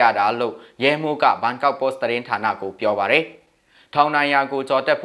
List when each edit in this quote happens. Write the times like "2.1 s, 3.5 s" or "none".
none